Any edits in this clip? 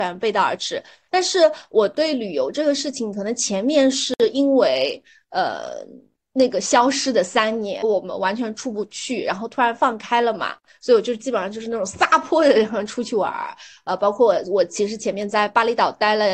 no; 0 cuts

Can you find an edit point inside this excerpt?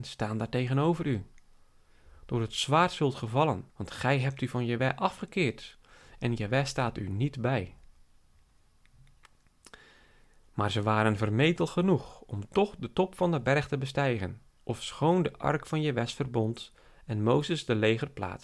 yes; 1 cut; at 3.7 s

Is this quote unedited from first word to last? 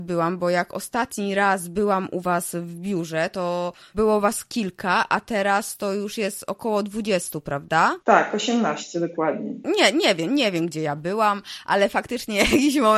yes; 0 cuts

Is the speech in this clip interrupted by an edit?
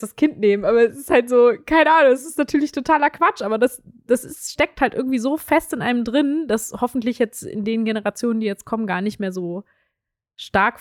no; 0 cuts

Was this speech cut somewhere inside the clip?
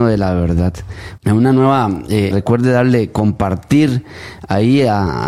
yes; 2 cuts; at 1.2 s, 2.3 s

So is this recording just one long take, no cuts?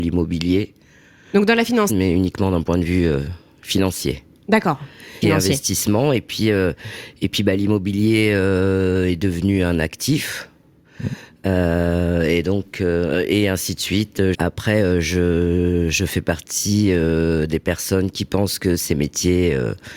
no; 3 cuts; at 1.9 s, 5.2 s, 14.3 s

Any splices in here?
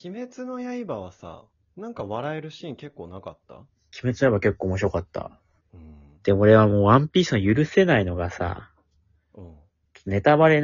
yes; 1 cut; at 5.6 s

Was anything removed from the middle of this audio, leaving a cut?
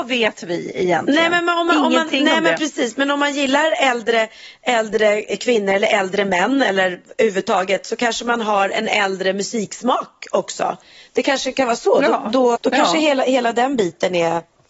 yes; 1 cut; at 12.6 s

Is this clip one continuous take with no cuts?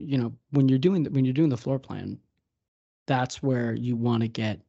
yes; 0 cuts

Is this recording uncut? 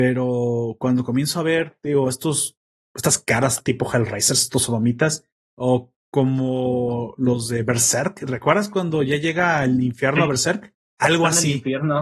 yes; 0 cuts

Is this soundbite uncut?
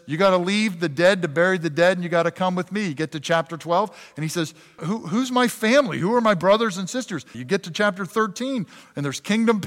no; 2 cuts; at 4.8 s, 7.3 s

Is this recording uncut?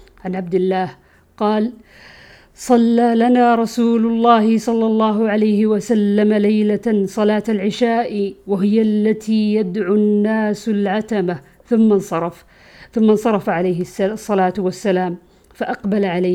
yes; 0 cuts

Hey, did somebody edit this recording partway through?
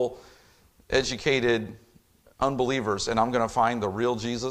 no; 0 cuts

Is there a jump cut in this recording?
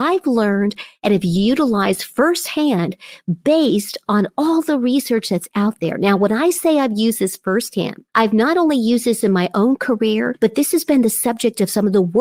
no; 0 cuts

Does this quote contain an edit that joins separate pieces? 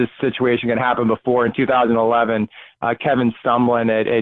no; 0 cuts

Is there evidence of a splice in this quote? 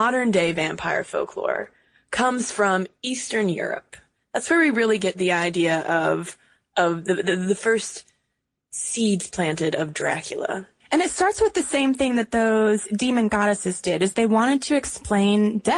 no; 0 cuts

